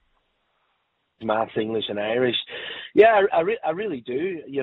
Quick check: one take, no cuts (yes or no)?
no